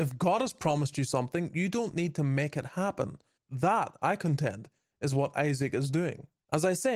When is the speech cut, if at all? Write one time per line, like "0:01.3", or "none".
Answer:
0:03.4

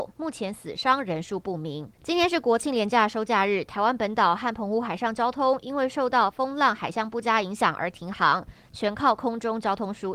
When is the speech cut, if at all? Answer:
0:01.9

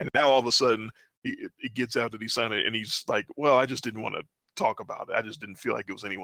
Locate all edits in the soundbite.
none

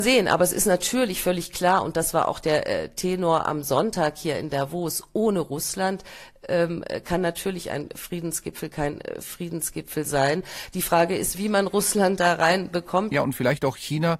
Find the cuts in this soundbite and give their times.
0:11.3
0:13.1

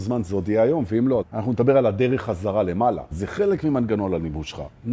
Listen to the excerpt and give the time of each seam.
0:01.2
0:03.1

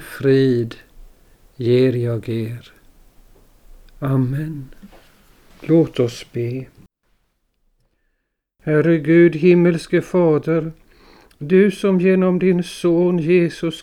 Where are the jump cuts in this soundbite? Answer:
none

